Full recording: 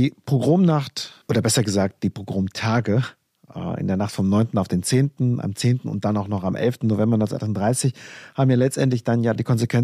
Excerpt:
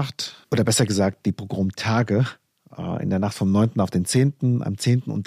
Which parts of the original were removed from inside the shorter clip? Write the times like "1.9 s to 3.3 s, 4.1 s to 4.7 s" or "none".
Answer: none